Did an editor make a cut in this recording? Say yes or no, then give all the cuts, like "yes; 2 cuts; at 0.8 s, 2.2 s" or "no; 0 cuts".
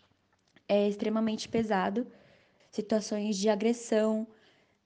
yes; 1 cut; at 2.6 s